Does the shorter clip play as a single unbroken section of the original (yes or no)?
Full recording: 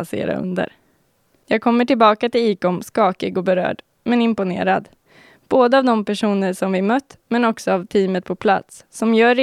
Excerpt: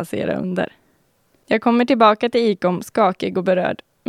yes